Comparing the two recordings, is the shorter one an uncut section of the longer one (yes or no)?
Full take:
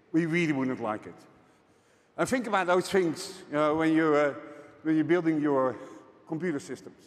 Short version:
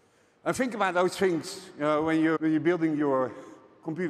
no